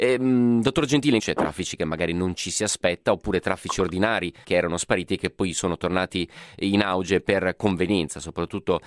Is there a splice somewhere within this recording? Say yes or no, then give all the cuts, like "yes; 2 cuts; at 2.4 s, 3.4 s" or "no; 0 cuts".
yes; 2 cuts; at 1.2 s, 4.4 s